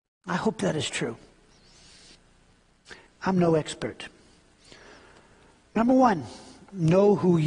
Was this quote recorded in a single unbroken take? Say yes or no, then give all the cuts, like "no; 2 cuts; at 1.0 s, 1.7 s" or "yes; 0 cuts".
no; 1 cut; at 3.1 s